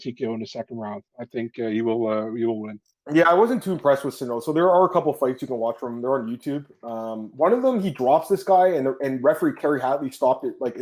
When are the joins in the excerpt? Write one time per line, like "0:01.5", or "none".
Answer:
none

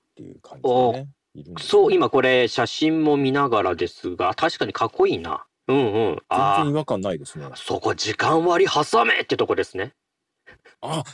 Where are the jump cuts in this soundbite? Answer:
0:05.6

